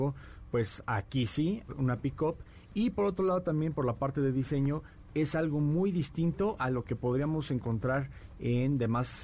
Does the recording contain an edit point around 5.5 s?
no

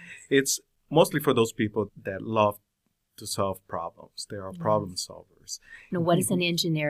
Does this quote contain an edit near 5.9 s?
yes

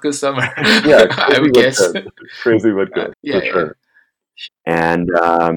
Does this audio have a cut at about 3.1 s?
yes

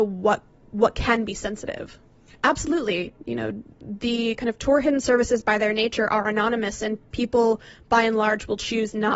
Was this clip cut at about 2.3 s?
yes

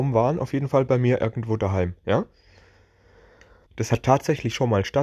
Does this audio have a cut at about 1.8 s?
no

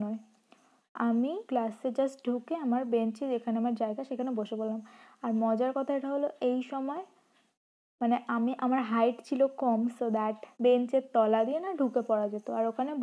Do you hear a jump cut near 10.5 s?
yes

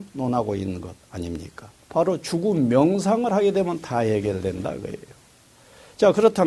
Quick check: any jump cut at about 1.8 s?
yes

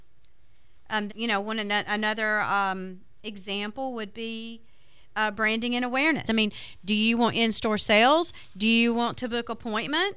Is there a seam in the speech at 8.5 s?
no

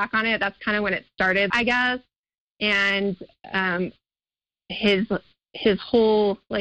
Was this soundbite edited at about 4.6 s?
no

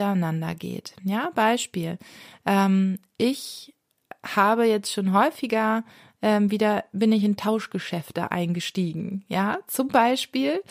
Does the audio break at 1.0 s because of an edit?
no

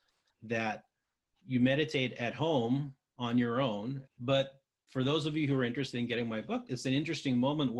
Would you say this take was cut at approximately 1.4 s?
no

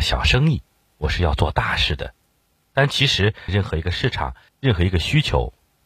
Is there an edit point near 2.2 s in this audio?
no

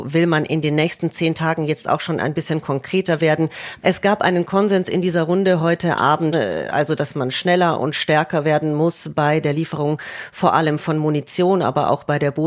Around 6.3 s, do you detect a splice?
yes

